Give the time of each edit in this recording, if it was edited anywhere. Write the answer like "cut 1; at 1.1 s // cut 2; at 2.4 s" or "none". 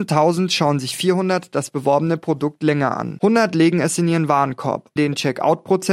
cut 1; at 5.0 s